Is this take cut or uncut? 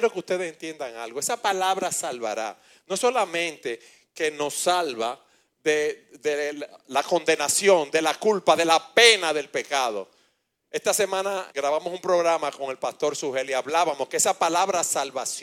cut